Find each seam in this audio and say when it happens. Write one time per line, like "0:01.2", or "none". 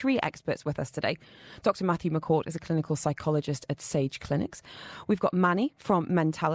none